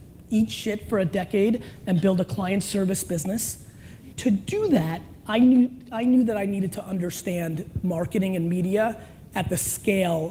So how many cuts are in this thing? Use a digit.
1